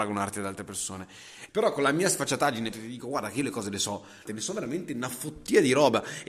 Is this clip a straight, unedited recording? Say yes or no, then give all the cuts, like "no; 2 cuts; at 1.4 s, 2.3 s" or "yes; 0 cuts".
no; 3 cuts; at 1.5 s, 2.7 s, 4.3 s